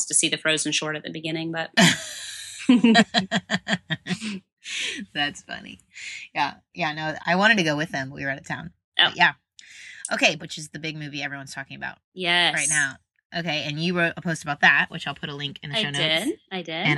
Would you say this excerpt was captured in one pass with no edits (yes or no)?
no